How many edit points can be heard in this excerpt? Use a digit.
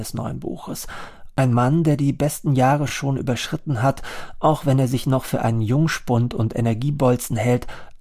0